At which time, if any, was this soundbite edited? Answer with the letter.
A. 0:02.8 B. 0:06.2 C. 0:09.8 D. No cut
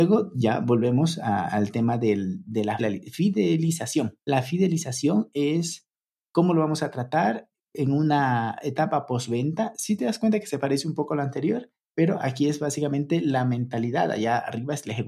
A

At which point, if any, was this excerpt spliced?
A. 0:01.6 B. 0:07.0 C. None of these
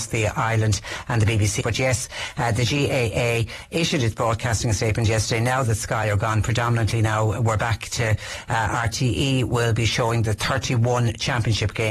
A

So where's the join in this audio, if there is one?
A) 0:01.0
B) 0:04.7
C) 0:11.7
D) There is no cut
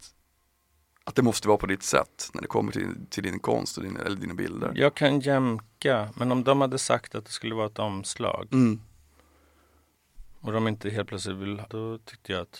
C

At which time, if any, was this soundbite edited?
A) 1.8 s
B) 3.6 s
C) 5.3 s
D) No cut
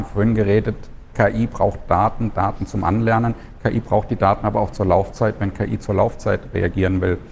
D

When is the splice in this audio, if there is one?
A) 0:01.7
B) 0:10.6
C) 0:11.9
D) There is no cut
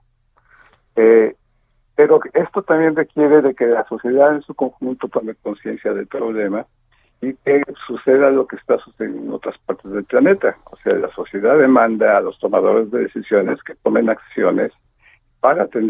D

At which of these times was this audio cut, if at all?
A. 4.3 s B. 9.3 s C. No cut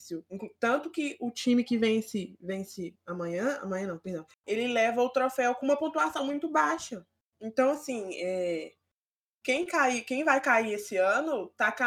A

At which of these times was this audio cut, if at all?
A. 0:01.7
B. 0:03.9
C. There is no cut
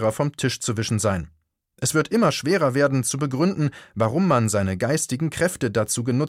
C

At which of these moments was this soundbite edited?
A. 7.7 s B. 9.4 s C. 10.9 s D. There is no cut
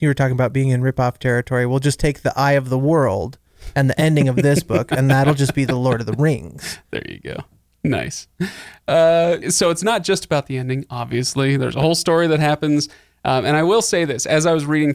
B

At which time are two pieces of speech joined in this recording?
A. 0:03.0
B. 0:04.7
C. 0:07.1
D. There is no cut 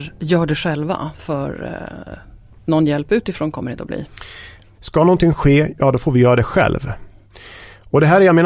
B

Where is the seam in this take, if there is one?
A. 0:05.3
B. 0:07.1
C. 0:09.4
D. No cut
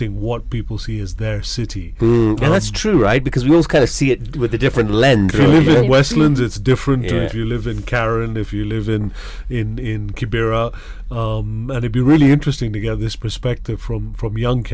A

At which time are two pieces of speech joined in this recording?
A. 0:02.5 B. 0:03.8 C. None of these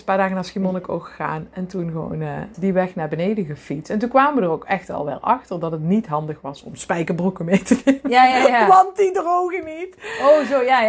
A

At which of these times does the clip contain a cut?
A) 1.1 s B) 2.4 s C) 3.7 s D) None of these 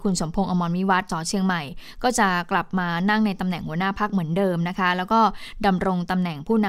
A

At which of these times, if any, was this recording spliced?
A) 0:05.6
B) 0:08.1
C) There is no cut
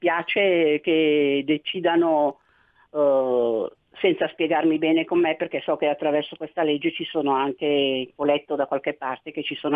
B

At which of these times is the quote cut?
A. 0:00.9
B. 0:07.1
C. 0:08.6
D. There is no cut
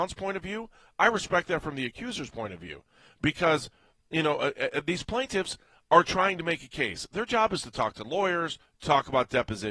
C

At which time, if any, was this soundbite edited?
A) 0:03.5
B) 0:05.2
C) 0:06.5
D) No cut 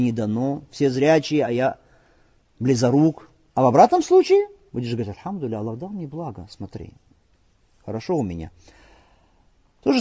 A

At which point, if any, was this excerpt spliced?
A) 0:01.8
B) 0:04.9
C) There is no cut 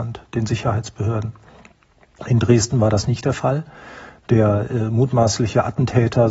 C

